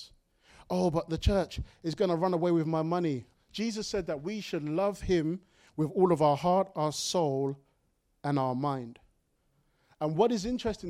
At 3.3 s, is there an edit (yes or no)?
yes